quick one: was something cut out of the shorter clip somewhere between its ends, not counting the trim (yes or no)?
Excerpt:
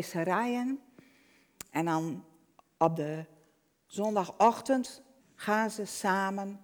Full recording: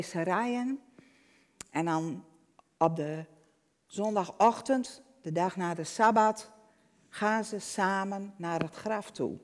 yes